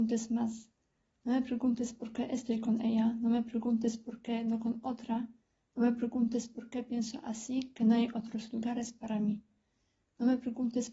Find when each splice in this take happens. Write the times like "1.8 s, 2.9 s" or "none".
none